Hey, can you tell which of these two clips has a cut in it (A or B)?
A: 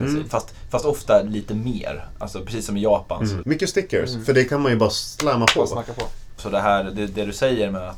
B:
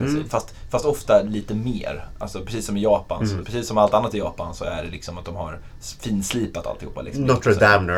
A